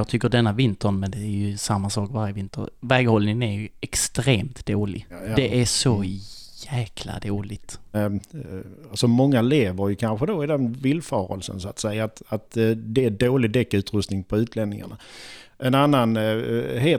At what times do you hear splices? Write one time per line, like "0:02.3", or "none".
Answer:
0:07.9